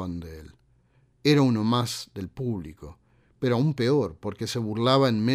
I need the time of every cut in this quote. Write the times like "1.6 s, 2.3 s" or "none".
none